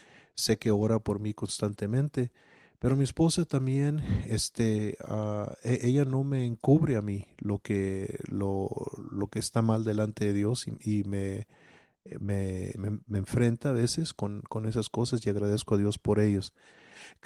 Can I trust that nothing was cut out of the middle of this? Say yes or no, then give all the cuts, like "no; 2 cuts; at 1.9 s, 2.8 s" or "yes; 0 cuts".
no; 1 cut; at 12.7 s